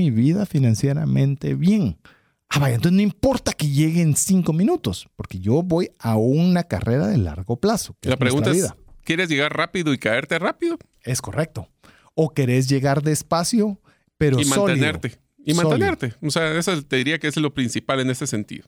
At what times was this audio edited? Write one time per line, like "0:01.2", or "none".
none